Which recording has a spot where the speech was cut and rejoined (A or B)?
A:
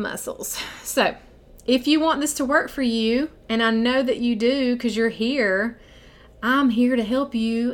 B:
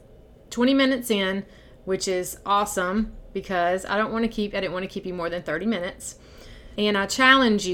B